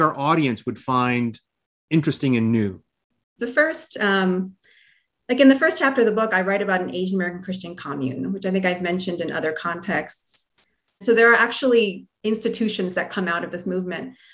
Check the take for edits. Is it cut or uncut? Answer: cut